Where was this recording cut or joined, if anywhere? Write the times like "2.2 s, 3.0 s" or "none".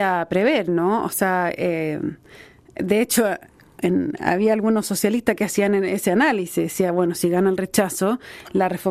none